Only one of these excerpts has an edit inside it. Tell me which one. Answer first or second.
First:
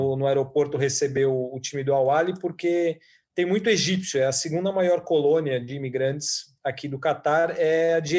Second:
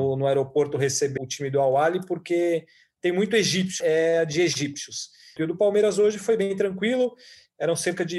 second